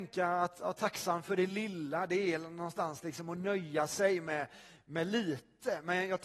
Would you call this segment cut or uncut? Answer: uncut